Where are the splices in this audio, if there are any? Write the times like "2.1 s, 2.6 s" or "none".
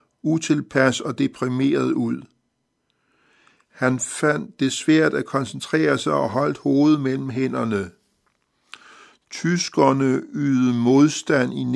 none